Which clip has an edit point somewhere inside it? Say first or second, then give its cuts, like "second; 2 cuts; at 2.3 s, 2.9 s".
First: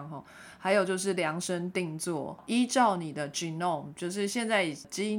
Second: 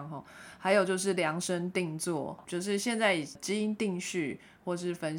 second; 1 cut; at 2.4 s